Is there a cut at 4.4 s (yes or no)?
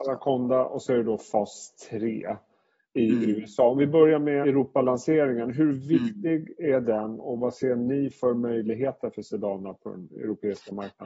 yes